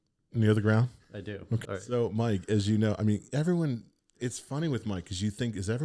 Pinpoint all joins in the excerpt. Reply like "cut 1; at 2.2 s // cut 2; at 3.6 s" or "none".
cut 1; at 1.7 s